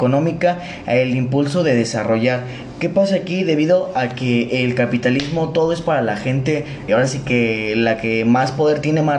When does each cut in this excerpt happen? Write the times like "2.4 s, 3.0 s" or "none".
6.9 s